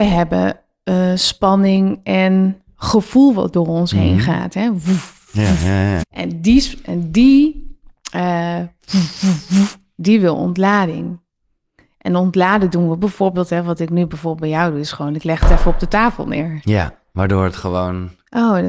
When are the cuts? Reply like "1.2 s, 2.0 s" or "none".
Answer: 6.0 s